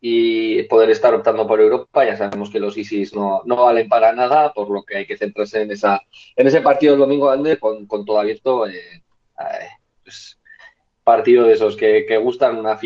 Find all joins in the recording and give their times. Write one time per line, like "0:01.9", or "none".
none